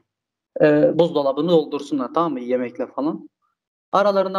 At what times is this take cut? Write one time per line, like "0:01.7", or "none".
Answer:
0:00.9